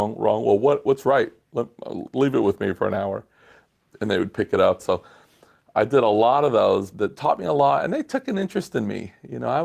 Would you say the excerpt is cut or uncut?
cut